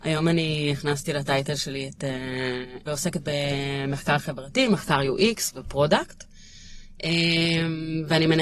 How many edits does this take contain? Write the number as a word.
one